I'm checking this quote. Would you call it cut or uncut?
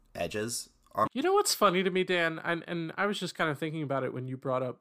cut